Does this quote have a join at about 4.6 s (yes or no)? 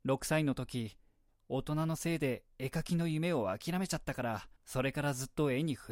yes